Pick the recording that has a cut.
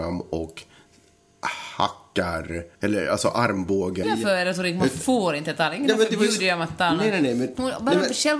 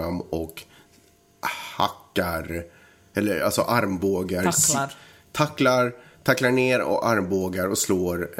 first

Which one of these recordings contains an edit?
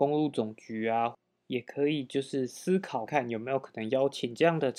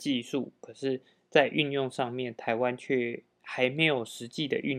first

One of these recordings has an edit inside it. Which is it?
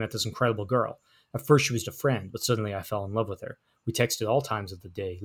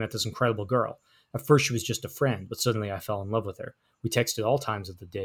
first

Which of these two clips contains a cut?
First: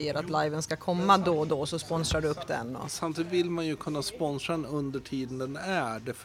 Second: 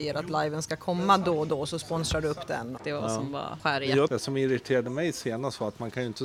second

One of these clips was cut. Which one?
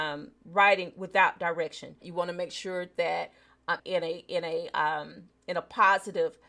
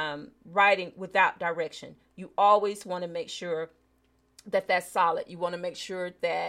first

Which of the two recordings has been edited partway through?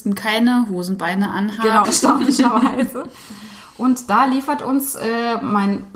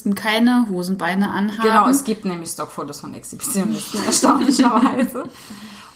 first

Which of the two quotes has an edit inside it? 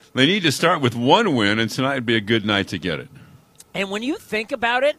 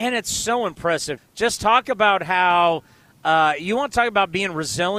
second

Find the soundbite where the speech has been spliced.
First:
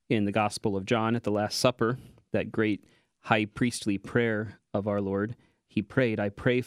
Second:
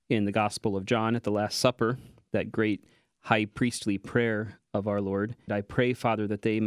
second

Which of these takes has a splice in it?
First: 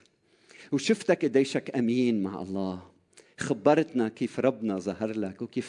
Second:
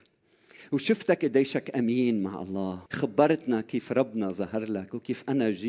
second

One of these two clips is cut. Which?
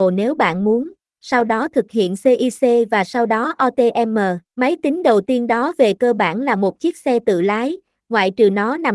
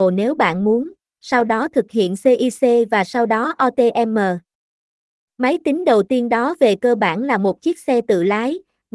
first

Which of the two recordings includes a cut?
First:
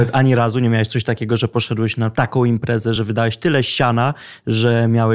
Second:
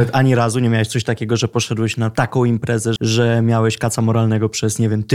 second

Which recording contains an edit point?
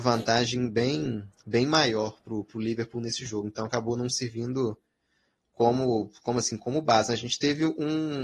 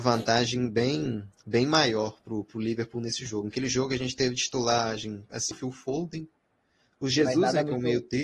second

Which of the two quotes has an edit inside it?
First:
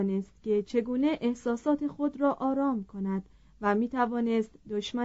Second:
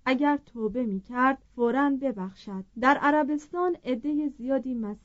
second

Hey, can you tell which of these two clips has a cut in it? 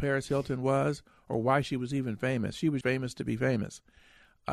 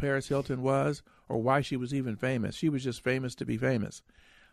first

